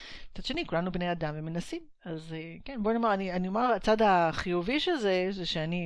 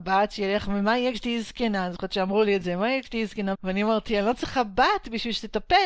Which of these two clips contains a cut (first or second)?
second